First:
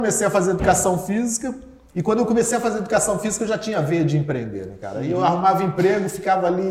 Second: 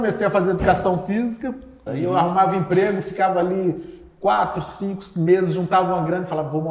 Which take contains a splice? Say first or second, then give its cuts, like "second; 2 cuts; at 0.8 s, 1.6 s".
second; 1 cut; at 1.9 s